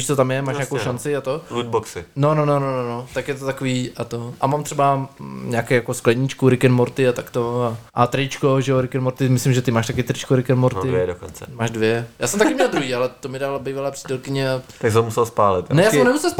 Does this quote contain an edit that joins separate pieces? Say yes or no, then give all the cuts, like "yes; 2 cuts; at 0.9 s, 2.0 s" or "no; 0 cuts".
yes; 1 cut; at 7.9 s